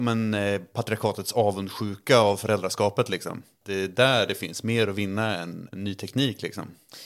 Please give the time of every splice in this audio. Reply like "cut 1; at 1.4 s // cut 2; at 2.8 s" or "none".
cut 1; at 5.7 s